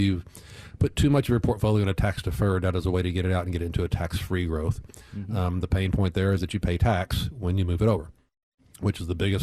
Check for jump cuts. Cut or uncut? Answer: uncut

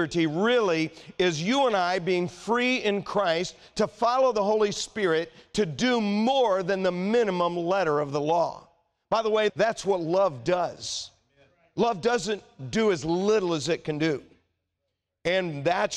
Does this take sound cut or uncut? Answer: cut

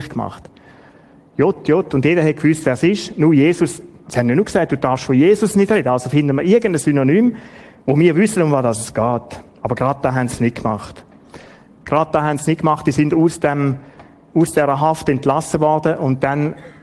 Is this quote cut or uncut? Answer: uncut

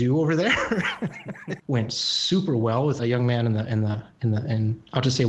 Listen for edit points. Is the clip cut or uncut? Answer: cut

